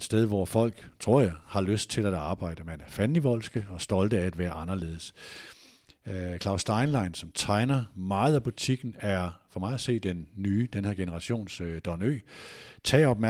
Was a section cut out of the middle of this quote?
no; 0 cuts

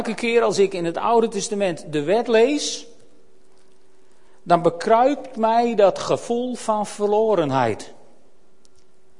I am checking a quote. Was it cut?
no; 0 cuts

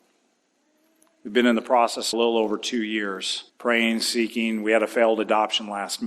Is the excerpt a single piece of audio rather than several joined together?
no; 2 cuts; at 2.1 s, 3.5 s

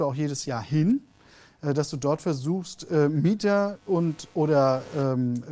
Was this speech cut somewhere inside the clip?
no; 0 cuts

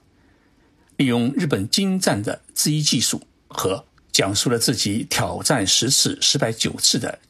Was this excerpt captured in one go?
no; 1 cut; at 4.0 s

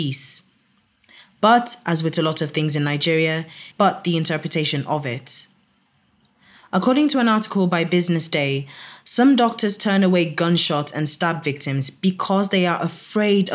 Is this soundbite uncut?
no; 1 cut; at 3.7 s

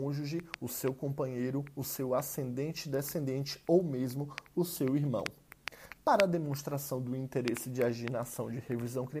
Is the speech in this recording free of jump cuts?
yes; 0 cuts

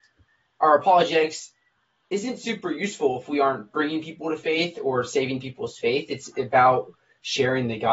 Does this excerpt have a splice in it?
no; 0 cuts

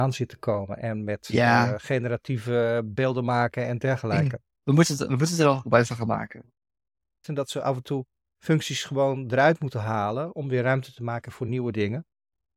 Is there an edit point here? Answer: yes; 2 cuts; at 4.6 s, 7.2 s

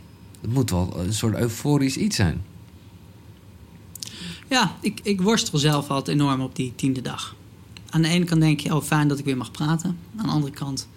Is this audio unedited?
no; 1 cut; at 5.0 s

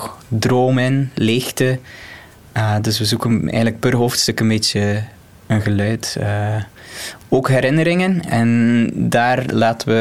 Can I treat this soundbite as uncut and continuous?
yes; 0 cuts

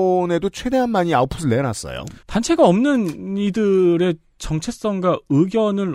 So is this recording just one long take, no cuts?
no; 1 cut; at 2.2 s

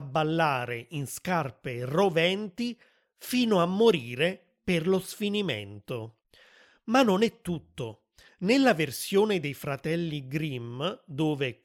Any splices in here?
no; 0 cuts

